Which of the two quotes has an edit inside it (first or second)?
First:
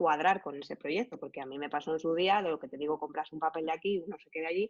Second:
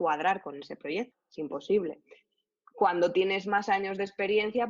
second